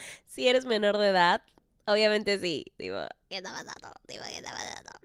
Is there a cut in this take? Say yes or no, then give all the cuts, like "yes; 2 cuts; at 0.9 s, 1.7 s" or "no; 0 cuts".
no; 0 cuts